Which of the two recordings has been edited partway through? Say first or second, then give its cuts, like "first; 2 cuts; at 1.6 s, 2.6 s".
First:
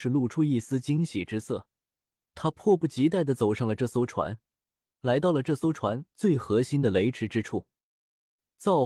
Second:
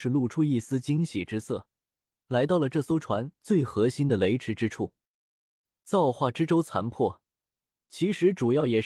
second; 1 cut; at 2.2 s